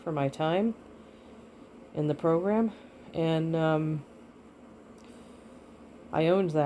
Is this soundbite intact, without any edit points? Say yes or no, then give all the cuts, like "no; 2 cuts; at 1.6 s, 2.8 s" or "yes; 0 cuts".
yes; 0 cuts